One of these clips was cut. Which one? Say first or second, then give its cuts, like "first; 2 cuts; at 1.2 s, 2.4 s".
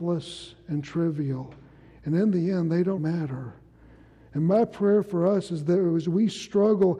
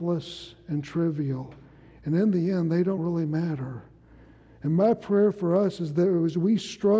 first; 1 cut; at 3.0 s